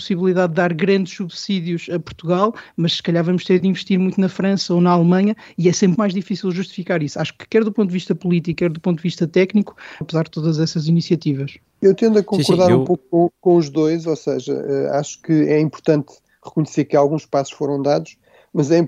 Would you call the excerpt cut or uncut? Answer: cut